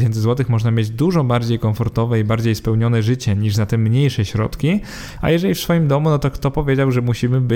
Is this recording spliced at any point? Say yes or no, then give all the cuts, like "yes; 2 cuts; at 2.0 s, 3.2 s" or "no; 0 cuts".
yes; 1 cut; at 5.2 s